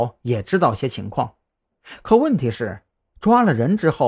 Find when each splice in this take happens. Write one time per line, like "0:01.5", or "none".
none